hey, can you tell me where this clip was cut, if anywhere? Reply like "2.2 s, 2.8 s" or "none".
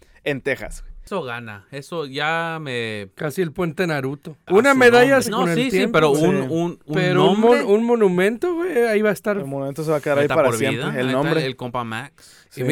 5.2 s

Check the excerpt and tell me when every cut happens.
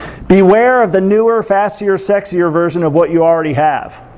none

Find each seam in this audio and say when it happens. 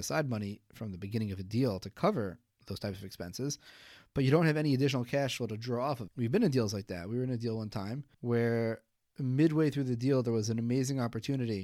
6.1 s, 8.1 s

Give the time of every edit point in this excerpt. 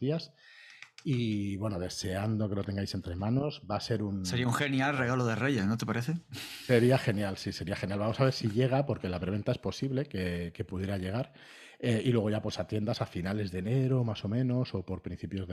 none

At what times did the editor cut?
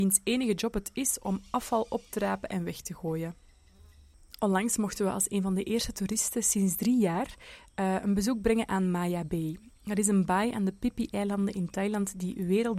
none

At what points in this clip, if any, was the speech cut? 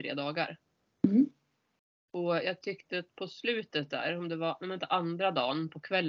none

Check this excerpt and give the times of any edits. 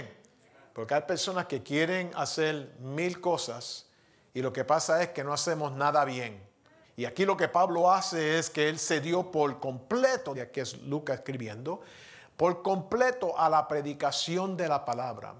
6.8 s, 10.3 s

